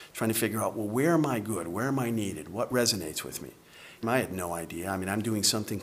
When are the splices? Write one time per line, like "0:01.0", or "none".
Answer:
0:04.0